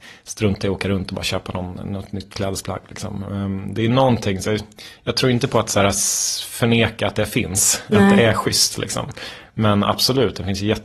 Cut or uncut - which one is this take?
uncut